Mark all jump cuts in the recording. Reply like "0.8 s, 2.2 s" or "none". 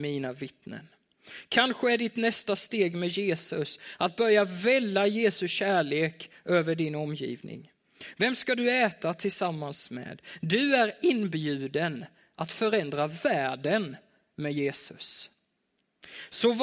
8.1 s

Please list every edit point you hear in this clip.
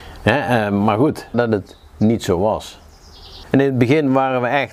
1.3 s, 3.4 s

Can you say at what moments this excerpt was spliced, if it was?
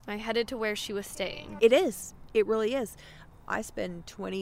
1.6 s, 3.4 s

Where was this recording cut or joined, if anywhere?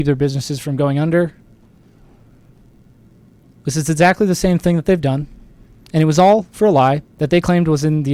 7.1 s

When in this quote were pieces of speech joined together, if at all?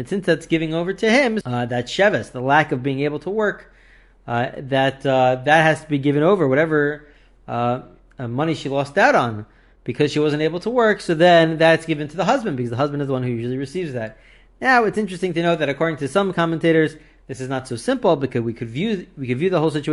1.4 s

